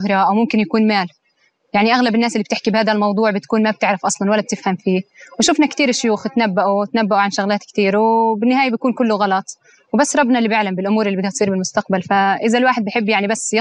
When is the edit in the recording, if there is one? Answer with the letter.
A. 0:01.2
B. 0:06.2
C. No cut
C